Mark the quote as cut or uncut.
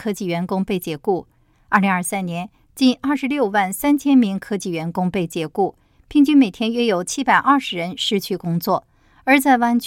cut